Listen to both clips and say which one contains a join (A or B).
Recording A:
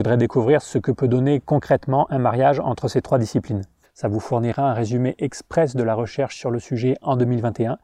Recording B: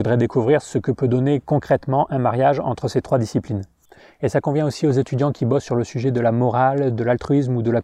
A